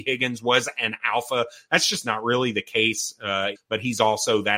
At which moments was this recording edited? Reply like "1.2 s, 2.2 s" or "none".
3.6 s